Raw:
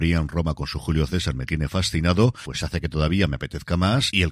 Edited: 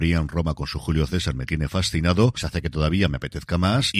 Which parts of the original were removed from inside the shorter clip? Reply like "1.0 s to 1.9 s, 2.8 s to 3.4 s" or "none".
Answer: 2.4 s to 2.6 s